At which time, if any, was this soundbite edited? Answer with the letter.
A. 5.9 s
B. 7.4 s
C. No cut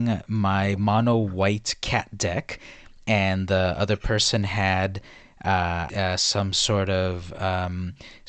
A